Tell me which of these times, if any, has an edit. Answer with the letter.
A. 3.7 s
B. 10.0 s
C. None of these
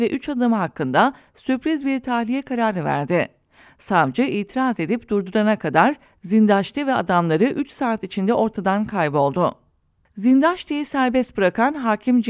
C